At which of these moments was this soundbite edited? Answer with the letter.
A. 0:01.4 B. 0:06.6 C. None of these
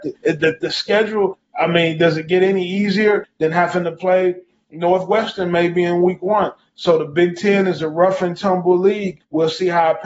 C